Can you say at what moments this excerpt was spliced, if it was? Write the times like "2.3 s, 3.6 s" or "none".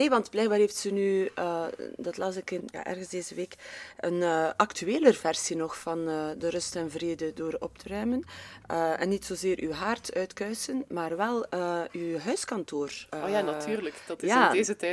2.6 s

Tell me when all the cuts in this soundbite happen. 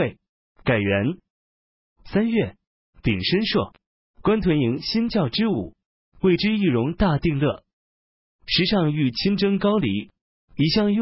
4.0 s

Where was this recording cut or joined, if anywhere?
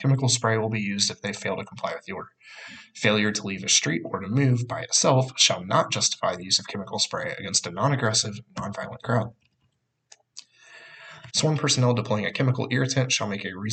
11.3 s

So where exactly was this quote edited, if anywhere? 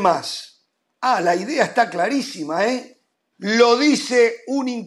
3.3 s

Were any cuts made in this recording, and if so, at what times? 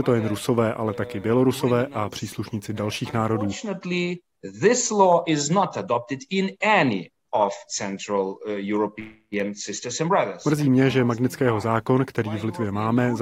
none

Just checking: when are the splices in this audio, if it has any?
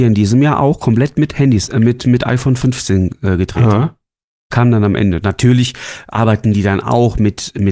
none

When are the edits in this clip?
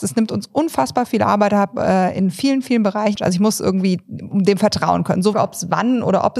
3.2 s, 5.3 s

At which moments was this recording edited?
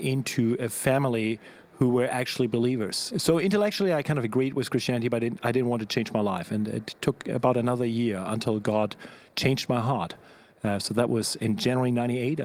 3.1 s

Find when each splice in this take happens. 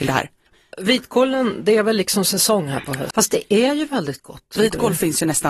3.1 s, 4.6 s

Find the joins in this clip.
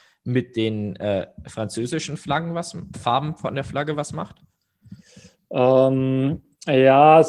2.9 s

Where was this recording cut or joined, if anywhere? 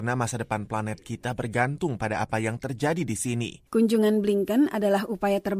3.7 s

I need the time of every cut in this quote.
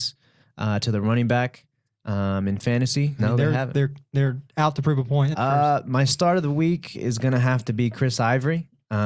3.2 s, 5.3 s

